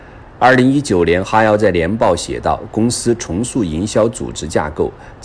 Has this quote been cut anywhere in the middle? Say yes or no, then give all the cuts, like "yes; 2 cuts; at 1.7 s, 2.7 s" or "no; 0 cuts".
no; 0 cuts